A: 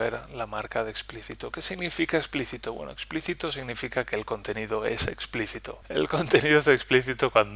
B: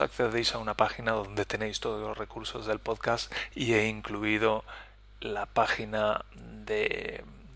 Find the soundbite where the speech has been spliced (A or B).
A